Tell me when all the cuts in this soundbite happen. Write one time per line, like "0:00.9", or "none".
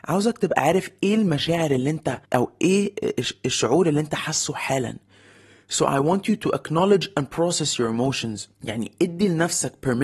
0:02.3
0:08.5